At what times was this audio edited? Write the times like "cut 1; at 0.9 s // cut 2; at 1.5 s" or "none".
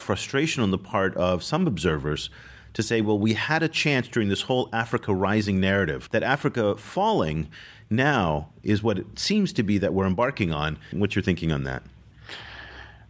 cut 1; at 6.1 s // cut 2; at 10.9 s

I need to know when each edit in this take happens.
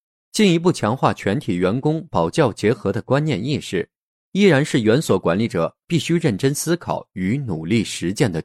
none

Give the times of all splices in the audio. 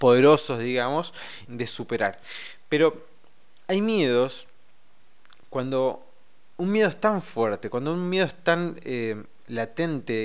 cut 1; at 1.5 s

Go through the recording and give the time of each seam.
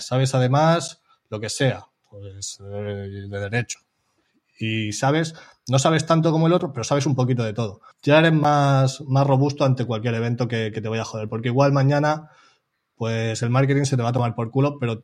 cut 1; at 7.9 s

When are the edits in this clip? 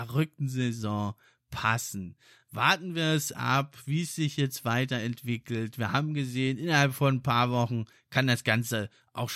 none

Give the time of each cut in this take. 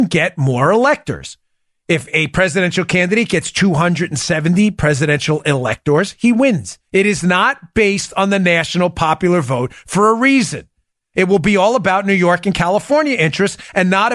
cut 1; at 6.9 s // cut 2; at 11.1 s

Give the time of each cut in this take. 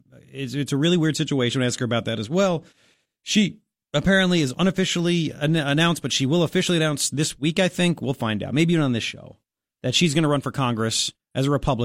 none

